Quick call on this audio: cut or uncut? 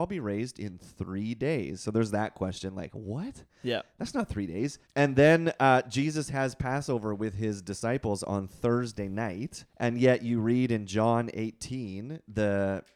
cut